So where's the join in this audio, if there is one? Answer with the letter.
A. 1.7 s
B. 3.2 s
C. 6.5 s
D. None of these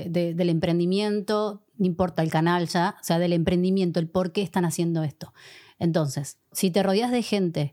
C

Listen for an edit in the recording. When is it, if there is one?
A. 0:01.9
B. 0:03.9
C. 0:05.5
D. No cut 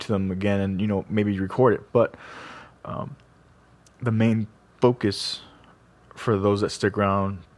A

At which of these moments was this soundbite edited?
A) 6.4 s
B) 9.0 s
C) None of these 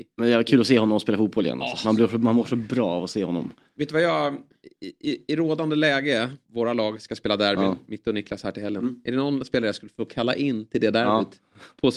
A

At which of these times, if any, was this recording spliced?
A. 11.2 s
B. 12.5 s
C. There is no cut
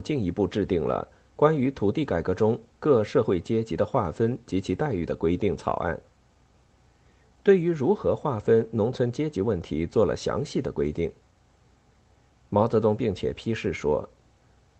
C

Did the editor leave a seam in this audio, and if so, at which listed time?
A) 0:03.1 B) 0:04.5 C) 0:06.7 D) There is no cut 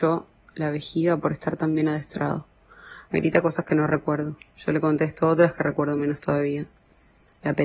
A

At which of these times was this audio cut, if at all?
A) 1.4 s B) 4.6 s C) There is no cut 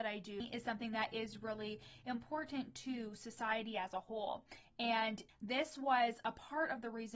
C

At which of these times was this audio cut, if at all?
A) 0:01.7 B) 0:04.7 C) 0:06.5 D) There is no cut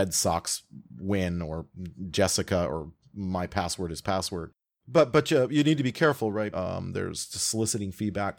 C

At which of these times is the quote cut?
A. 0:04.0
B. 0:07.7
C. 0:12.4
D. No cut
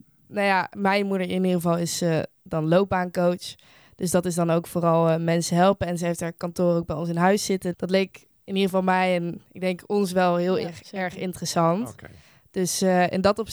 B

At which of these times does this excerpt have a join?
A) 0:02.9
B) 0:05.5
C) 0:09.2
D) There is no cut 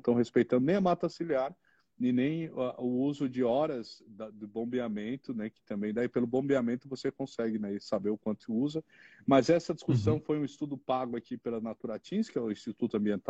D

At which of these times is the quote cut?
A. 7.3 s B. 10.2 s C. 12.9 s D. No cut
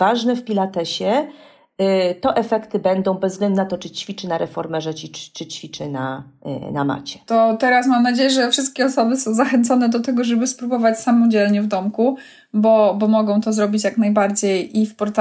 A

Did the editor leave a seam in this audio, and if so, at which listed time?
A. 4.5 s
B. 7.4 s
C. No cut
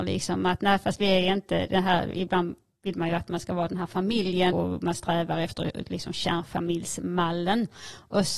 A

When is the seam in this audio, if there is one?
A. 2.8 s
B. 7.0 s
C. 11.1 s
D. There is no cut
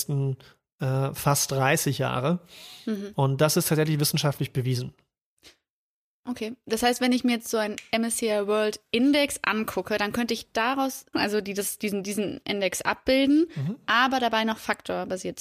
C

